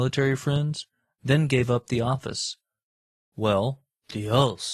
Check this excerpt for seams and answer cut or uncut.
uncut